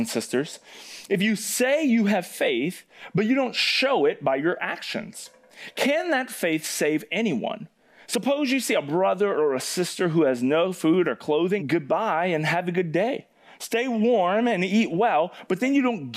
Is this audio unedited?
no; 1 cut; at 11.6 s

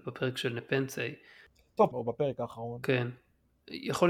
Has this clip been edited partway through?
yes; 1 cut; at 1.9 s

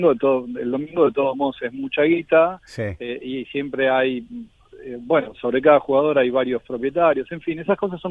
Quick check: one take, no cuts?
yes; 0 cuts

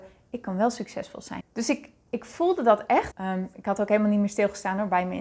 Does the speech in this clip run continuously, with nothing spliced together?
no; 2 cuts; at 1.4 s, 3.1 s

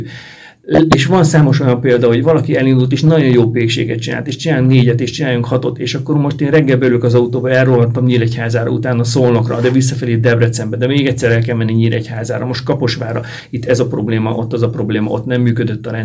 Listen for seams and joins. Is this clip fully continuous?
yes; 0 cuts

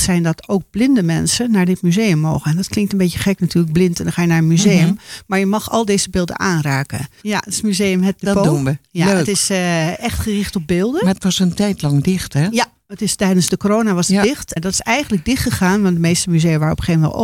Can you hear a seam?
yes; 2 cuts; at 7.2 s, 14.6 s

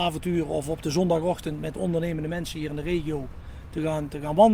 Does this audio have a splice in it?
no; 0 cuts

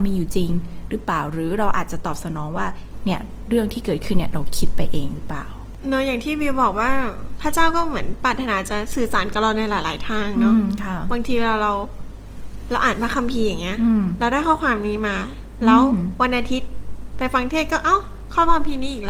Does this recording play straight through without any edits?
yes; 0 cuts

